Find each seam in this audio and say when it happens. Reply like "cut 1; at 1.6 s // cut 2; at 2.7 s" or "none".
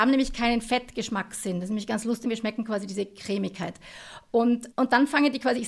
cut 1; at 2.2 s // cut 2; at 4.7 s